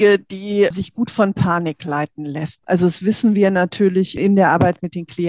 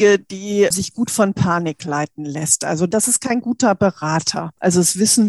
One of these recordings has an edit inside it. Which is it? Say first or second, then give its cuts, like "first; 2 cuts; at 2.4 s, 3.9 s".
first; 1 cut; at 2.6 s